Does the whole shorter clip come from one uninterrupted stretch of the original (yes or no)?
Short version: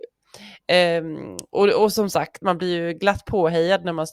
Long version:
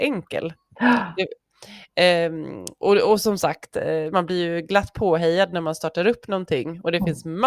no